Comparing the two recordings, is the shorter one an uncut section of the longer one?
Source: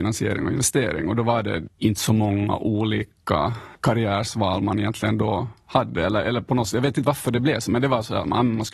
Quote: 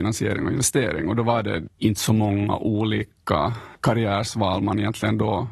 yes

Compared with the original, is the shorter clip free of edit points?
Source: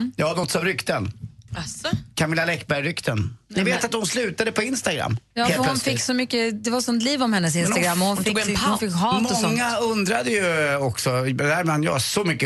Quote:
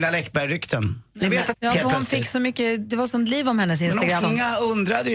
no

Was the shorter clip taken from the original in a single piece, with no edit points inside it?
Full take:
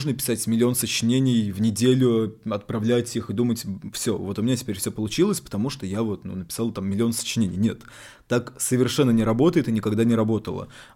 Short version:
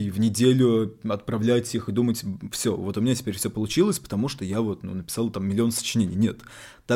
yes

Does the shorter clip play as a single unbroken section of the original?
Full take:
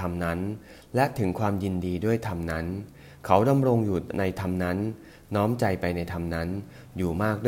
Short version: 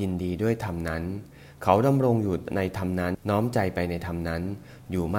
no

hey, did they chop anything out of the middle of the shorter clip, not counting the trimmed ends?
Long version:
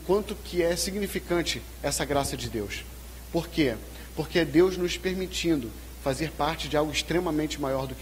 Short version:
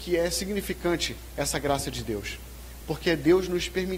yes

